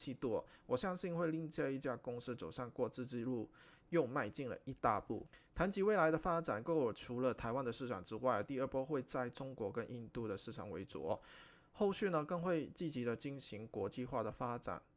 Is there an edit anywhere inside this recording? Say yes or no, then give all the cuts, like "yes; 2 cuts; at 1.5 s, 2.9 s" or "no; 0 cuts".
no; 0 cuts